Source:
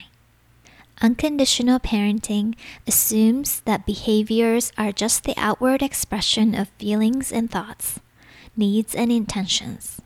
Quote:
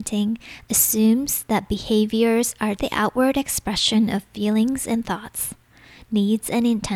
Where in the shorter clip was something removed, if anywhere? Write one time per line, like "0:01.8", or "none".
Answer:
0:02.8